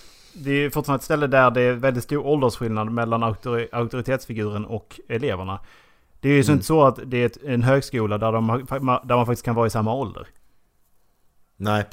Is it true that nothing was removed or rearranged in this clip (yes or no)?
yes